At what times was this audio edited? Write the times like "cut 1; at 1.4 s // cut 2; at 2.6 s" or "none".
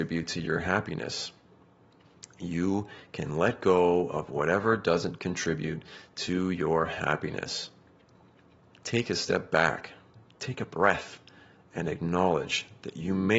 cut 1; at 8.7 s